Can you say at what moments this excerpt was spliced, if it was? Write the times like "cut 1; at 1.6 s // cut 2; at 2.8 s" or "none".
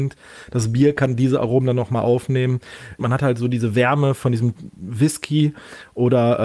cut 1; at 3.0 s